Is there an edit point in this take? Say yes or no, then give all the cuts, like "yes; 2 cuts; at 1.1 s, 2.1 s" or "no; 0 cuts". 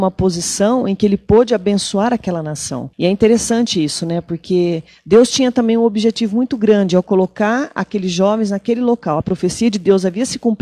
yes; 2 cuts; at 2.9 s, 9.2 s